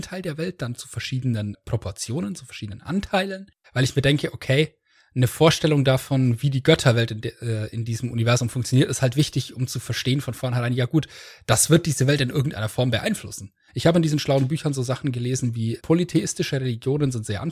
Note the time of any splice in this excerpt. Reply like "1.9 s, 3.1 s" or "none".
3.6 s, 13.7 s, 15.8 s